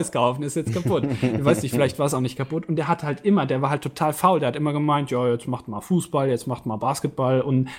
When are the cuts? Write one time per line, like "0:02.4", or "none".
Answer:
none